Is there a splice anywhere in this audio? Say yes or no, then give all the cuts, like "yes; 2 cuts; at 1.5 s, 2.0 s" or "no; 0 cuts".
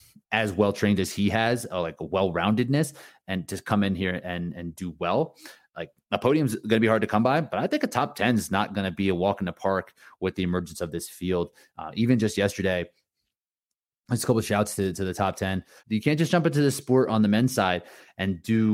yes; 1 cut; at 15.8 s